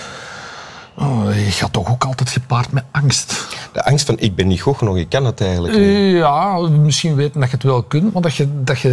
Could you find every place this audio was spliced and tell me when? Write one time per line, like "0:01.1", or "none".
none